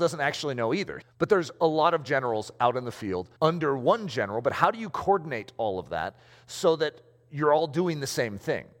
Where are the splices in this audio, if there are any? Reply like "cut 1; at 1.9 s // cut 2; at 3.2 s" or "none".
cut 1; at 1.0 s // cut 2; at 3.4 s